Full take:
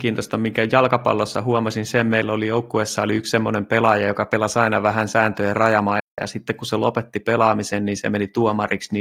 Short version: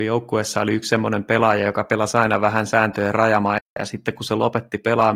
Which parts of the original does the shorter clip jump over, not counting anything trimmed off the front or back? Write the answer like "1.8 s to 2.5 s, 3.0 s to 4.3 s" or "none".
none